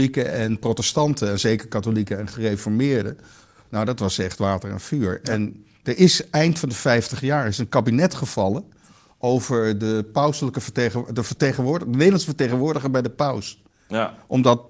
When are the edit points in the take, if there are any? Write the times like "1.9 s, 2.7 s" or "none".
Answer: none